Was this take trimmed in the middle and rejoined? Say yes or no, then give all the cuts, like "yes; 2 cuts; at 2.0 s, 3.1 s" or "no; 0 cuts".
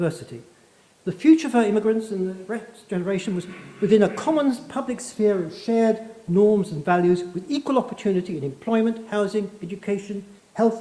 no; 0 cuts